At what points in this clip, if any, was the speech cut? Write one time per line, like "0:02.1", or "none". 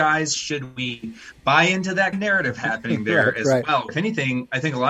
0:02.1
0:03.9